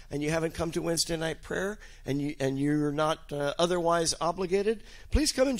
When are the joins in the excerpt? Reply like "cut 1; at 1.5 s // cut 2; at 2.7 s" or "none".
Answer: none